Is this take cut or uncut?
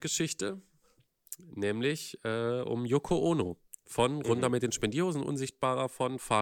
uncut